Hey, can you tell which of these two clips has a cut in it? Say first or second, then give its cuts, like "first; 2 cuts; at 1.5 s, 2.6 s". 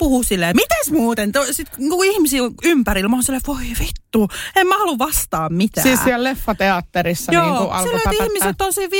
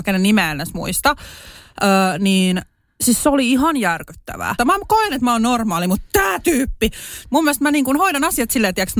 second; 2 cuts; at 4.6 s, 7.2 s